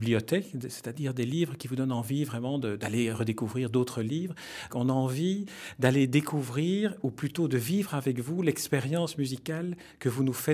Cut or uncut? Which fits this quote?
cut